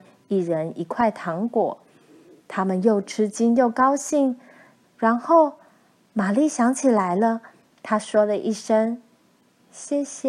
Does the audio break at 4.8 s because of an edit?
yes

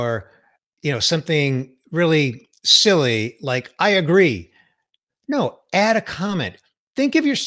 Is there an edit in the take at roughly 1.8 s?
no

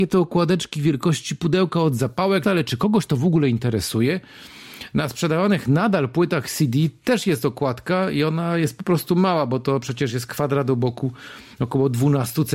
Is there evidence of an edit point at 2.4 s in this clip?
yes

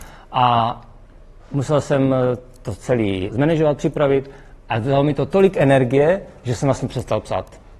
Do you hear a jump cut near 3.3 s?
yes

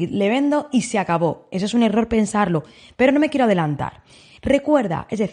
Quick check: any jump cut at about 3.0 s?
yes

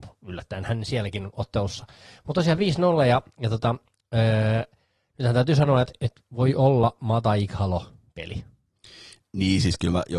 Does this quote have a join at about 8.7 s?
no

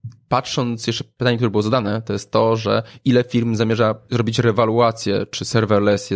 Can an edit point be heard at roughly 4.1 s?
yes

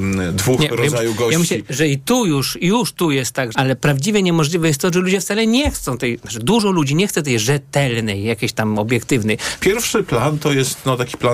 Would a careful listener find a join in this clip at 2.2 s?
no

